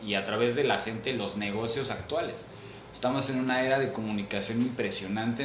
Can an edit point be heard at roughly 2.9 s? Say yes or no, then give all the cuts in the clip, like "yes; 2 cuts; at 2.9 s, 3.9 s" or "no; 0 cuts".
no; 0 cuts